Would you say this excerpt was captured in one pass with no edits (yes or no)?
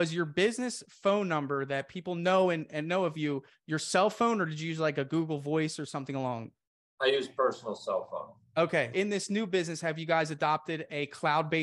no